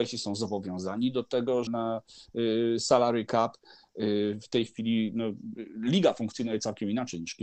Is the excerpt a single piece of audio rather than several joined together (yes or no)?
no